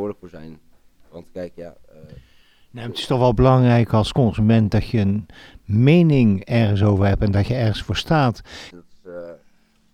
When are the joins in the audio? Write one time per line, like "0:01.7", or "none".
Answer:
0:08.7